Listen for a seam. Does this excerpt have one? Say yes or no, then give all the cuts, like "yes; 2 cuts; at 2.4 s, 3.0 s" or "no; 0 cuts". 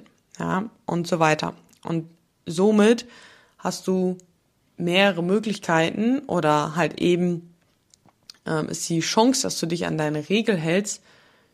no; 0 cuts